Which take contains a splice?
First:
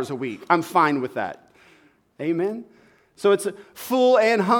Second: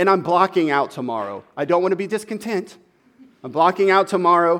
first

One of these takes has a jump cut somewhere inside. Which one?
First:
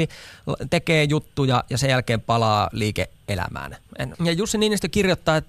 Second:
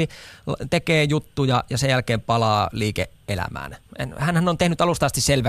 first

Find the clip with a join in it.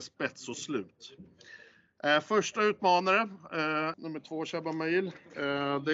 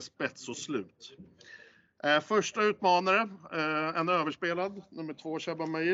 first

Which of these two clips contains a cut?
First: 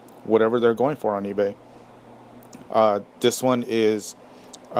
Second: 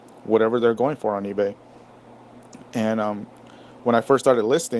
first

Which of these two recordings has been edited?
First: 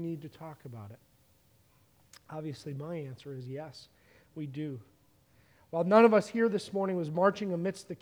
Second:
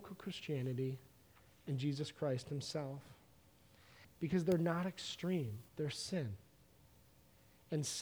second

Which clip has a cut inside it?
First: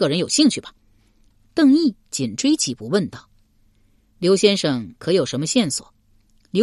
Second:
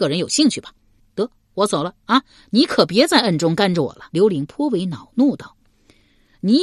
second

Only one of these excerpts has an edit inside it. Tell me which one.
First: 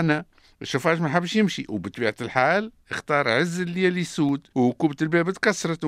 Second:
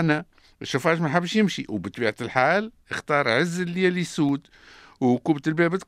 first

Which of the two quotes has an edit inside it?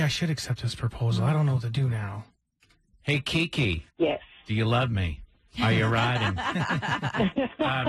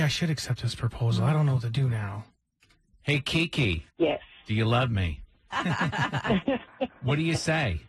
second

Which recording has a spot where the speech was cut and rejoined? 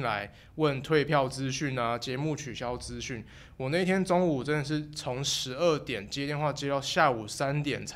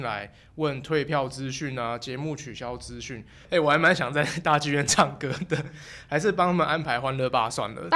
second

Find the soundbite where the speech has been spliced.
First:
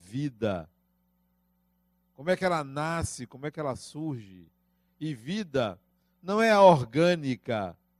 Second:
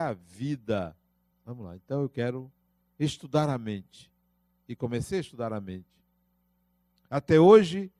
second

